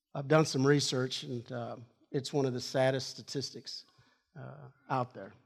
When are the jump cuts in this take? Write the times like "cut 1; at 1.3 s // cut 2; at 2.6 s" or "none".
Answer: none